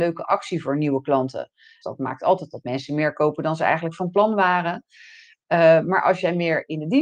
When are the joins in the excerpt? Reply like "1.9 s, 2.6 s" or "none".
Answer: 1.8 s